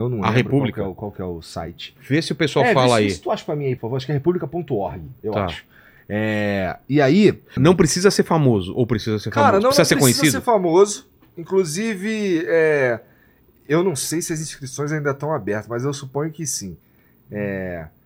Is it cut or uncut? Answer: cut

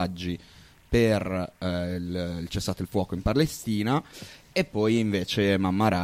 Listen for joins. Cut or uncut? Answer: uncut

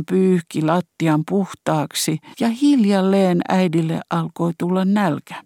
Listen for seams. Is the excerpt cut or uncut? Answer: cut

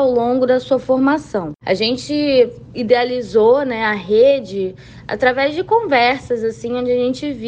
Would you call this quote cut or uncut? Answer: cut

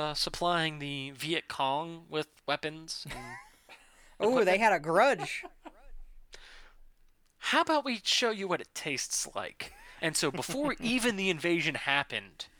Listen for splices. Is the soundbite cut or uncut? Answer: uncut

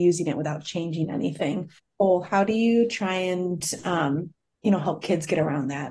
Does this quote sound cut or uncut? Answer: uncut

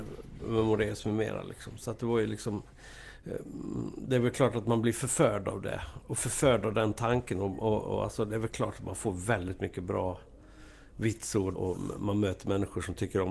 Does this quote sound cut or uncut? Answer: cut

